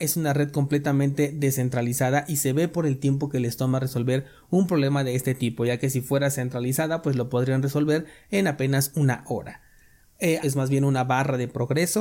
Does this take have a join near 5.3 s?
no; 1 cut; at 10.4 s

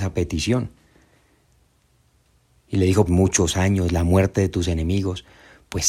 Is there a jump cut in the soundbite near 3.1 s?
yes; 1 cut; at 3.1 s

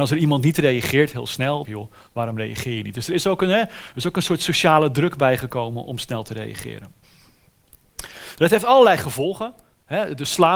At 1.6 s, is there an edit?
yes; 1 cut; at 1.6 s

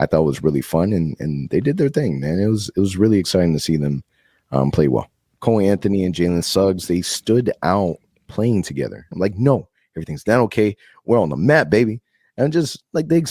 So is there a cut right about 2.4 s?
no; 2 cuts; at 5.3 s, 9.1 s

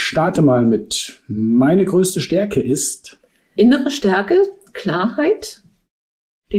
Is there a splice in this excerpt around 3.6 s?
yes; 1 cut; at 3.6 s

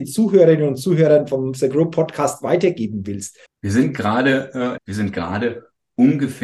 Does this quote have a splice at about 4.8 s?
yes; 2 cuts; at 3.5 s, 4.8 s

